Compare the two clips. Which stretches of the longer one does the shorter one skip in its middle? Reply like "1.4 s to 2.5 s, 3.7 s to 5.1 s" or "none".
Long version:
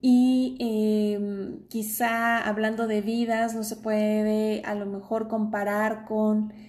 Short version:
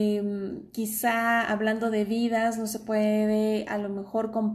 none

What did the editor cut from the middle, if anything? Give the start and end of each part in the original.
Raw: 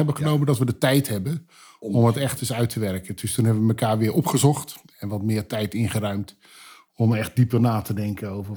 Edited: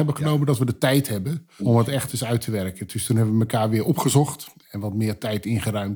1.6 s to 1.9 s

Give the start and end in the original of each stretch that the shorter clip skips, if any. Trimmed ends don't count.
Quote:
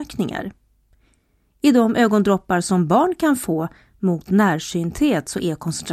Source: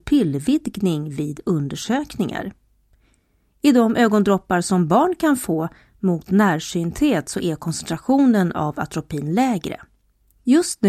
none

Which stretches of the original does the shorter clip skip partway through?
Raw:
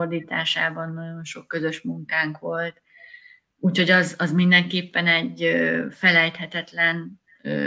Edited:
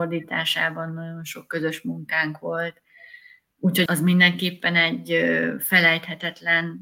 3.9 s to 4.2 s

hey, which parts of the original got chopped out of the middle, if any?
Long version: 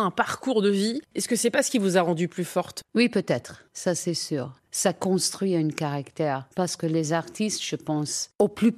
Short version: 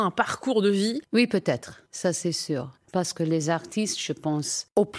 1.1 s to 2.9 s, 4.7 s to 6.5 s

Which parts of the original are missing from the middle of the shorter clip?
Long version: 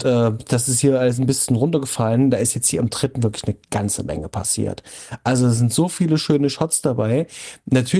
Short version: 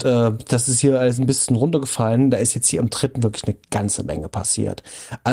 none

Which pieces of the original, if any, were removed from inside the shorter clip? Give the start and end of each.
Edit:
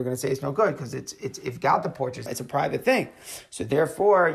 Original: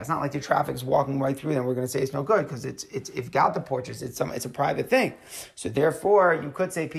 4.0 s to 4.3 s

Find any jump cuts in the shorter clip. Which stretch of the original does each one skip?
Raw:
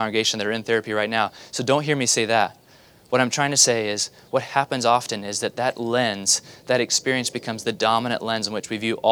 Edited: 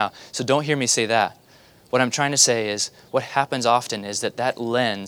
none

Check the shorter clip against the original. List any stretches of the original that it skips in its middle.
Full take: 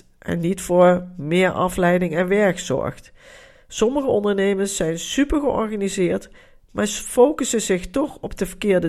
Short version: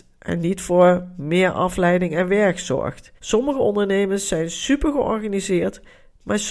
3.2 s to 3.6 s

